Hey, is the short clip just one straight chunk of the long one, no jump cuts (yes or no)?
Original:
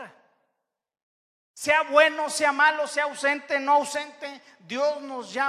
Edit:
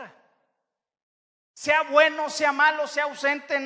yes